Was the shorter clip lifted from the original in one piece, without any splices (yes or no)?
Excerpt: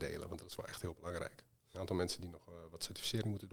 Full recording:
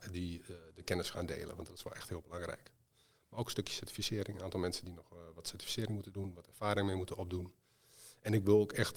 no